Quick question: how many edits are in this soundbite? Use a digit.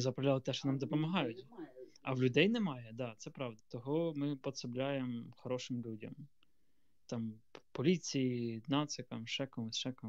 1